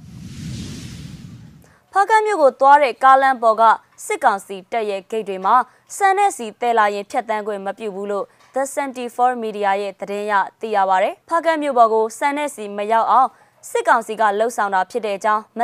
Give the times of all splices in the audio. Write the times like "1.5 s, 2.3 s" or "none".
11.2 s